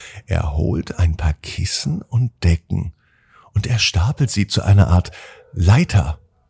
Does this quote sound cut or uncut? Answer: uncut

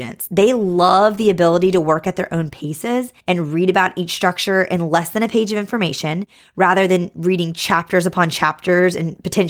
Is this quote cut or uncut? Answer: cut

